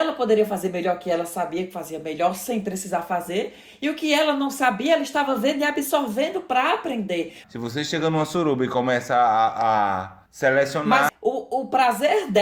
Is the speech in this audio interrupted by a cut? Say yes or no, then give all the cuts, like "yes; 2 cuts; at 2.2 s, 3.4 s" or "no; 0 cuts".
yes; 2 cuts; at 7.4 s, 11.1 s